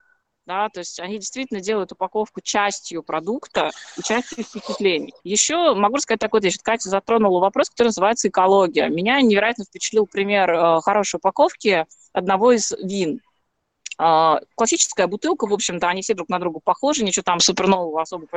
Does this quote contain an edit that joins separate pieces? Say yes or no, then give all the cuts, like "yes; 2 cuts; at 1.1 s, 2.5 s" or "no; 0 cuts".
yes; 1 cut; at 5.2 s